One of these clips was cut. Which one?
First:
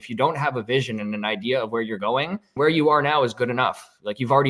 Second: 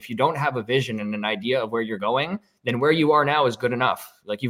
first; 1 cut; at 2.6 s

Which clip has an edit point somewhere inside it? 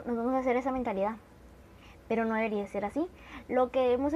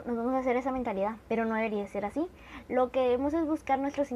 second; 1 cut; at 1.2 s

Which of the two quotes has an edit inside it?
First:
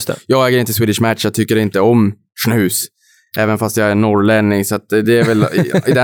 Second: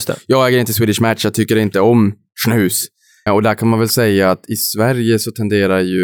second; 1 cut; at 3.3 s

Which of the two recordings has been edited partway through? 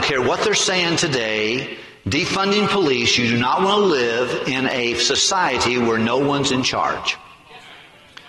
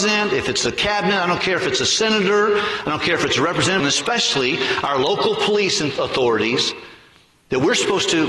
second; 1 cut; at 3.8 s

